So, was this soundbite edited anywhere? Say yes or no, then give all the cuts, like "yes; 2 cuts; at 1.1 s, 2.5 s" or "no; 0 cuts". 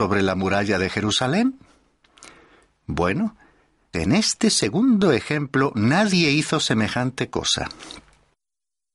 yes; 1 cut; at 3.9 s